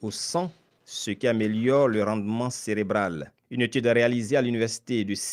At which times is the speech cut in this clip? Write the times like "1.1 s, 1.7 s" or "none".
3.4 s